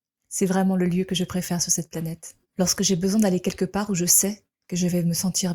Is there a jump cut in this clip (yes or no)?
yes